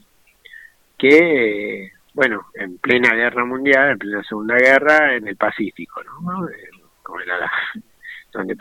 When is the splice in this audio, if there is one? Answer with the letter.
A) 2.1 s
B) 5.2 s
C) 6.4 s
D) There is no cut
D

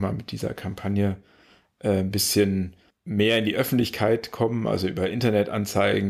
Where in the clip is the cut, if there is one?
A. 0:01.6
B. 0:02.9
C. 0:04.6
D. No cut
B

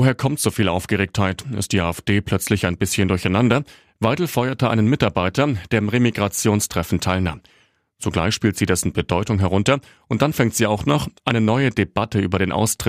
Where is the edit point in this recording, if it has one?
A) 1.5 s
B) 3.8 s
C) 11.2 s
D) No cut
C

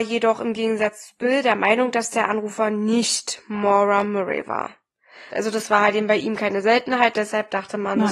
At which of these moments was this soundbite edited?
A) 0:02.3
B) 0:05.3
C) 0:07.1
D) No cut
B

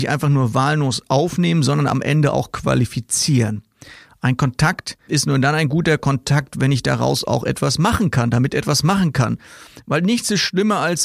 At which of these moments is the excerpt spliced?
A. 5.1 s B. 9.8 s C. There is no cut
A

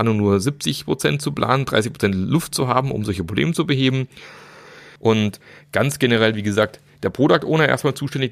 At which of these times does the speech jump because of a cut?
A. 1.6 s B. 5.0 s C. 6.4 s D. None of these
B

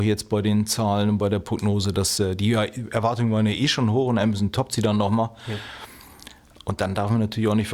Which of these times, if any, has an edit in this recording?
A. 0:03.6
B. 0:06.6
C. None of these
B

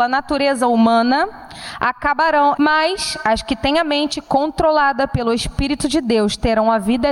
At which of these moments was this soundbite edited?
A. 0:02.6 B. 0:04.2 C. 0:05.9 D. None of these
A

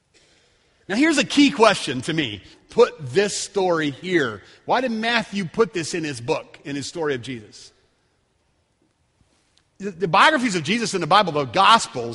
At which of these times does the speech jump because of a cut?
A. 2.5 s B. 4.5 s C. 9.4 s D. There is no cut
A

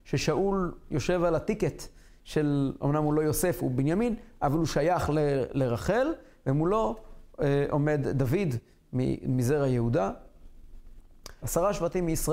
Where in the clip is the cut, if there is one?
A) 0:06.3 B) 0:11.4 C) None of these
B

